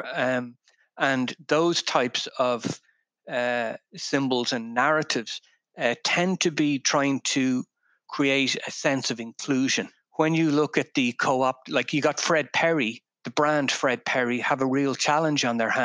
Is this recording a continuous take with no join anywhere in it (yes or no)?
yes